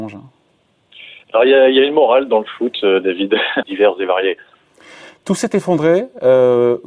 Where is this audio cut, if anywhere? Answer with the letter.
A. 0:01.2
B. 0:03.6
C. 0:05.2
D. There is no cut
B